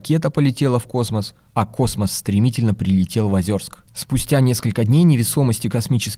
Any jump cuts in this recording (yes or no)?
no